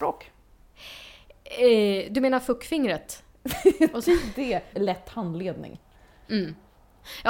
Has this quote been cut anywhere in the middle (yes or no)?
yes